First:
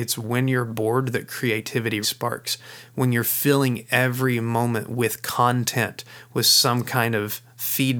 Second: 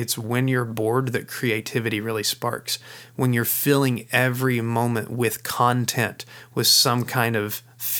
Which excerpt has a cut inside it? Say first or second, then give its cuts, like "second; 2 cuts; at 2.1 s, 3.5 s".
first; 1 cut; at 2.0 s